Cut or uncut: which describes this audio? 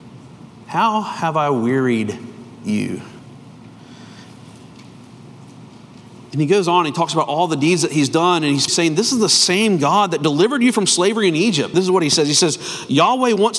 cut